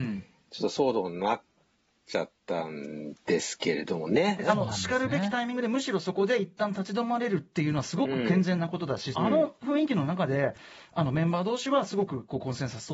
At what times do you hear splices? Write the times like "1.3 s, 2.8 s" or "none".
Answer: 4.4 s, 9.1 s